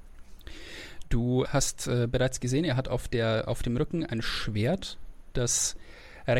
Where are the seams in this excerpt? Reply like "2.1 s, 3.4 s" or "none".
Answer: 1.4 s